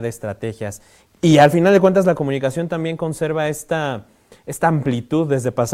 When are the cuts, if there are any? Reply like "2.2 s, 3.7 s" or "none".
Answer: 1.1 s